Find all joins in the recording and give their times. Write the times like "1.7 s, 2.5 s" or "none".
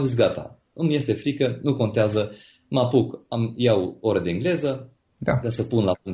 none